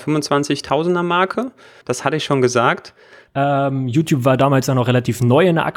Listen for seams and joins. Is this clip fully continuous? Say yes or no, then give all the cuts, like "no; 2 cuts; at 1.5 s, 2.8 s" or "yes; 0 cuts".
no; 2 cuts; at 1.8 s, 3.3 s